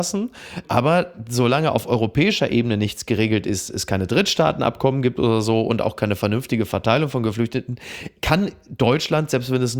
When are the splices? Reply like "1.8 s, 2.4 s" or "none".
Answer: none